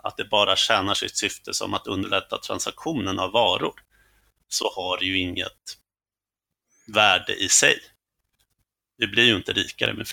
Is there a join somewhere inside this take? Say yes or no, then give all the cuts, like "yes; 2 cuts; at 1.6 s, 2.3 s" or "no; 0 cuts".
no; 0 cuts